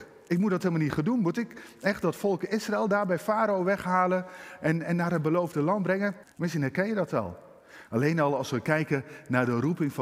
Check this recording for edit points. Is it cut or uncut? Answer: cut